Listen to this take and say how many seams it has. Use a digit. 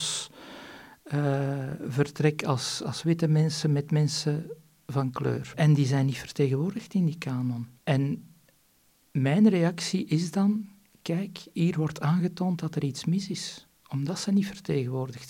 0